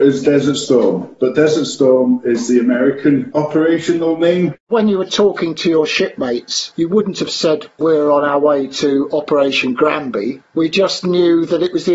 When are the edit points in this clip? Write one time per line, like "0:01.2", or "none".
0:04.6